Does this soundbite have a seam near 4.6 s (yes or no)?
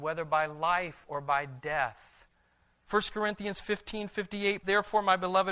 yes